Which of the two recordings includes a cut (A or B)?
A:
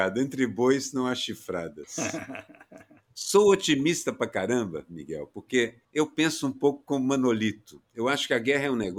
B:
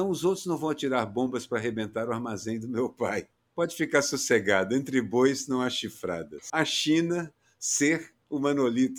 B